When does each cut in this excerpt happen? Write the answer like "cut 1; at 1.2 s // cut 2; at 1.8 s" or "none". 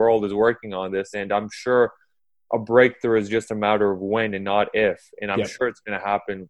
none